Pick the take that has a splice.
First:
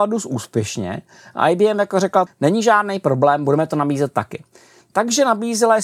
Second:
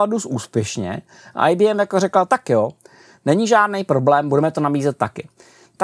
first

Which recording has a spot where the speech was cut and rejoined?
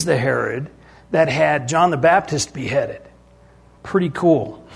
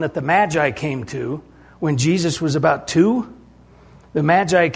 first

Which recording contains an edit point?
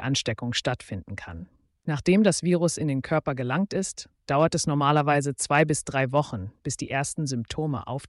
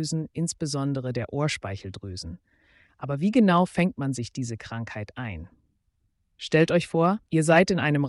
first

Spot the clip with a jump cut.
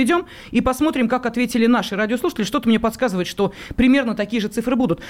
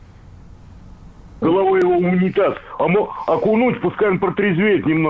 second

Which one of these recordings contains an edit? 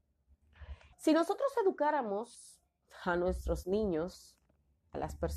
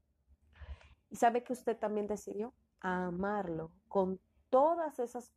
first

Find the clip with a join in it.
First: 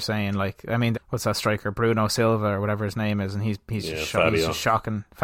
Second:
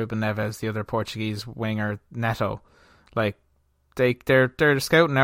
first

